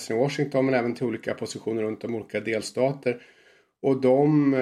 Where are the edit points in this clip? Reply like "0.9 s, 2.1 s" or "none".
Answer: none